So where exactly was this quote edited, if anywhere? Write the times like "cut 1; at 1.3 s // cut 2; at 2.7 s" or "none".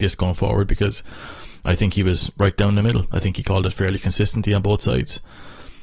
none